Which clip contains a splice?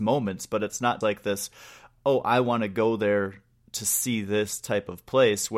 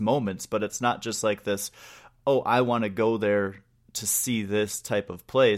first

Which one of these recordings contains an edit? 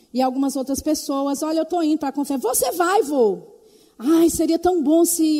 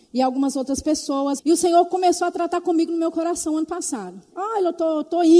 second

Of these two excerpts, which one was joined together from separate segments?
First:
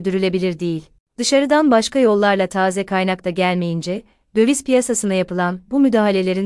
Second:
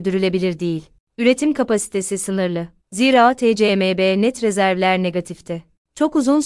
second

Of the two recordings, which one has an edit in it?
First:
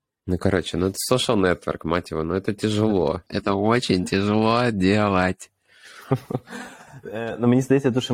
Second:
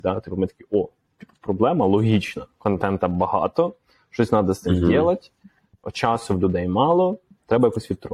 first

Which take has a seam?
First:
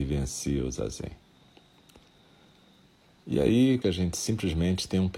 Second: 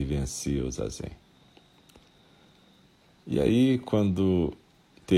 first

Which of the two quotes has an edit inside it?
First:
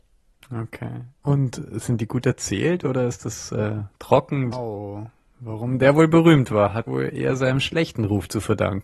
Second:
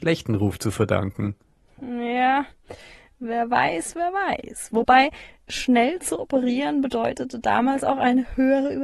first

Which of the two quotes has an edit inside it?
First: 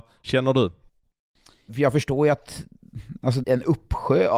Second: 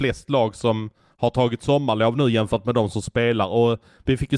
first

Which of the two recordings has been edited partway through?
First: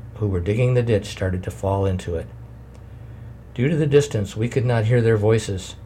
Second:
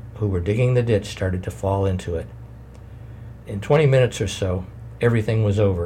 second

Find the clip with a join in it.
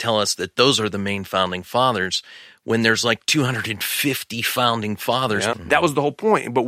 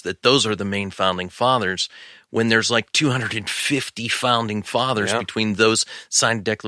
first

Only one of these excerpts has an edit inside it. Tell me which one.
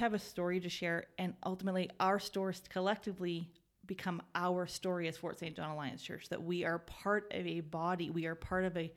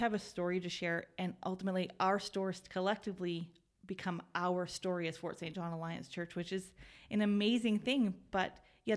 second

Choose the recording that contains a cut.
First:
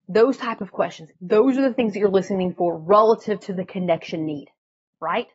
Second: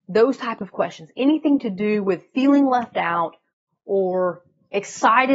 first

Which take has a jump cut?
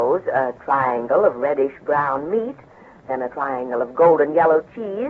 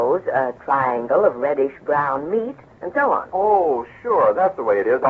second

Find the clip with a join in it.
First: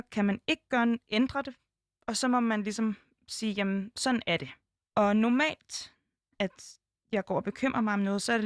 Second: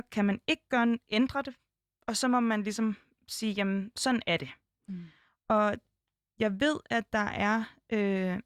first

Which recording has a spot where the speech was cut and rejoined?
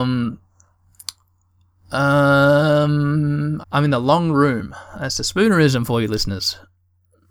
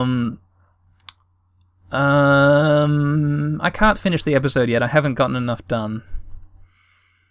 first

